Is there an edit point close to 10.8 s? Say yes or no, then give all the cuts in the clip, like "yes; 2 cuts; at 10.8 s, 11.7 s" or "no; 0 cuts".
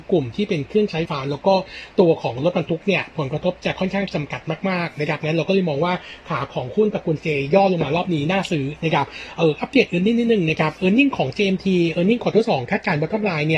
no; 1 cut; at 1.0 s